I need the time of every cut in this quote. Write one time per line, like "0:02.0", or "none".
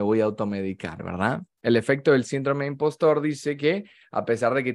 0:01.6